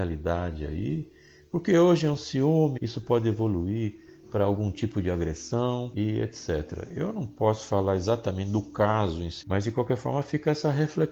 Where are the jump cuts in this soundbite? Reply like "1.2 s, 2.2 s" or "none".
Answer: 2.8 s, 9.4 s